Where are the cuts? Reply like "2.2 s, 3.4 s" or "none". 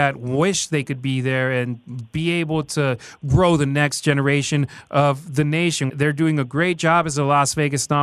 5.9 s

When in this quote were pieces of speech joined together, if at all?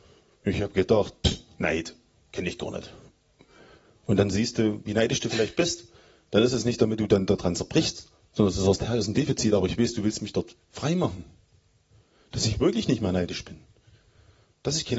none

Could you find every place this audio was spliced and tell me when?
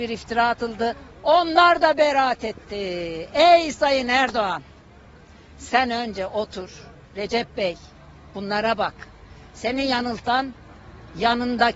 1.1 s

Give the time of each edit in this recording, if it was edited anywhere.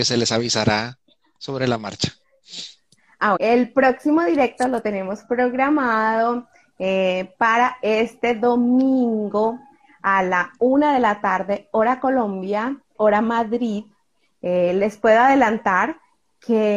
3.4 s, 12.9 s

